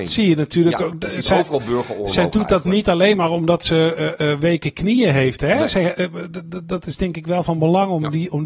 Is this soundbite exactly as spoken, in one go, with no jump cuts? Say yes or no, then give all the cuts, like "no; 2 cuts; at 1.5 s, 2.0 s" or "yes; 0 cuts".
yes; 0 cuts